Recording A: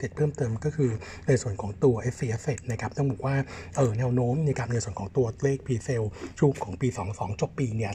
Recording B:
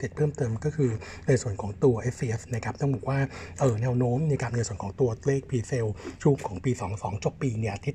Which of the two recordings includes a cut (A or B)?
B